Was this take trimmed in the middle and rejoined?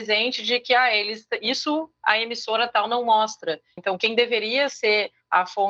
yes; 1 cut; at 3.8 s

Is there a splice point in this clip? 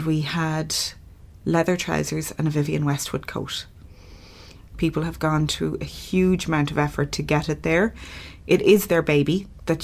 yes; 1 cut; at 4.7 s

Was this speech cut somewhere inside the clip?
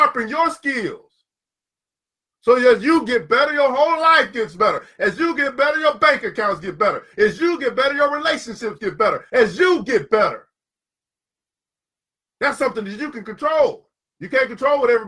no; 0 cuts

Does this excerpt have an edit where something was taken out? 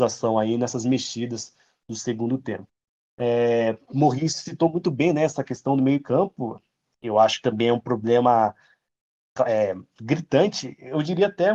no; 0 cuts

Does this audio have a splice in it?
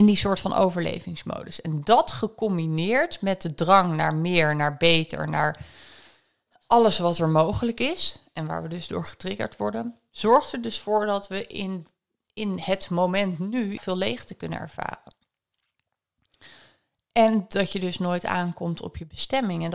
yes; 1 cut; at 13.8 s

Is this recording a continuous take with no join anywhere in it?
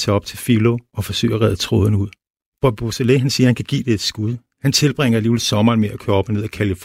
yes; 0 cuts

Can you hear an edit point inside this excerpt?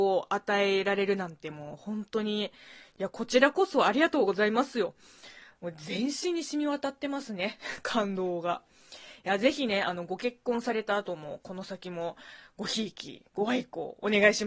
no; 0 cuts

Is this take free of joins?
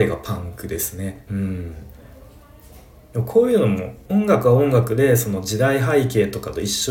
no; 2 cuts; at 1.3 s, 4.0 s

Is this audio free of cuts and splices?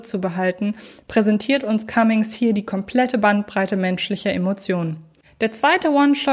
no; 1 cut; at 5.2 s

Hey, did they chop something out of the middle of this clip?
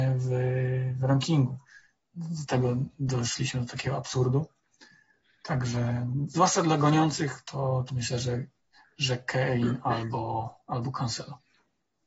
no; 0 cuts

